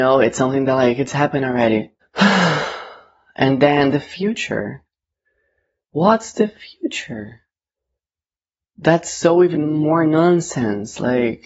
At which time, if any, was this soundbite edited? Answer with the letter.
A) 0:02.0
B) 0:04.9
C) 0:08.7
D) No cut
A